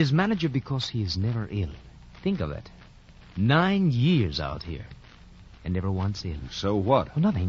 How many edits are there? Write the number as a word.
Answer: two